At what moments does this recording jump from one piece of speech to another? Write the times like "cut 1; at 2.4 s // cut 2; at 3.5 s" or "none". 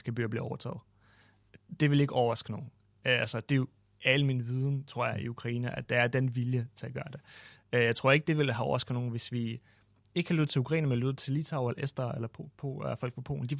none